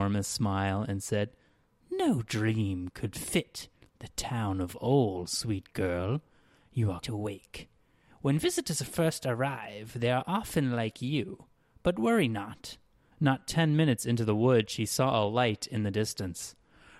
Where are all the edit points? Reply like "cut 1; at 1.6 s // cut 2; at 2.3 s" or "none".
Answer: cut 1; at 7.0 s // cut 2; at 13.1 s